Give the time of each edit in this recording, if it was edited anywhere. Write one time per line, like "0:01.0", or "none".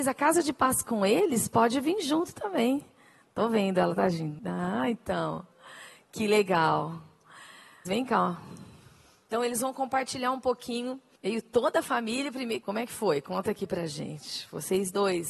0:07.8
0:12.6